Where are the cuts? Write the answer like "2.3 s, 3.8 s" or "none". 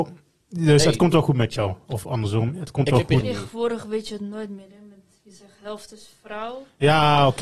3.2 s